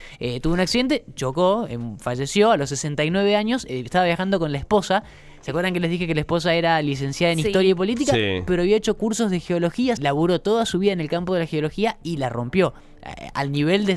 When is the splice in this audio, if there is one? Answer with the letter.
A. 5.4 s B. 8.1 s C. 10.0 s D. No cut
C